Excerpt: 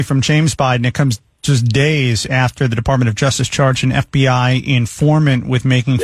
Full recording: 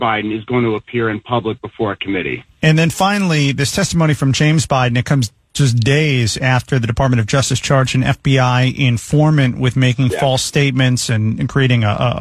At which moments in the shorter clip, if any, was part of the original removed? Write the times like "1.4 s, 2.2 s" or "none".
none